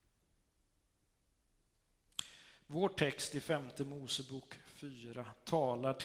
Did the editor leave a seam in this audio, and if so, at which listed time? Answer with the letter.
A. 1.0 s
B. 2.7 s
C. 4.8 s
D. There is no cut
D